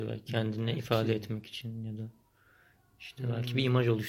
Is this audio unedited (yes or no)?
yes